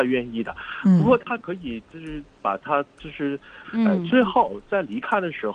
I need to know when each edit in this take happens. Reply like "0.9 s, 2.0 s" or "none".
3.6 s